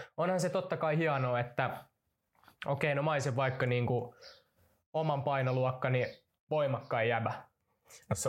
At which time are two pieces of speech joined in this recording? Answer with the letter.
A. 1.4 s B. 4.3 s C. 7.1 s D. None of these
D